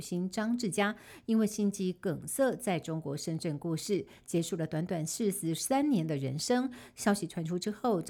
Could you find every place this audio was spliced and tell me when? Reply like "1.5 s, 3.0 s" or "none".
none